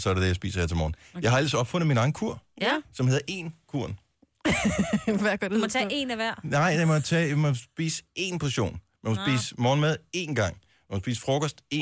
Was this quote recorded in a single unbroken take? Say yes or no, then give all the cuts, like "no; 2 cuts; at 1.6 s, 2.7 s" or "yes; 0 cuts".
yes; 0 cuts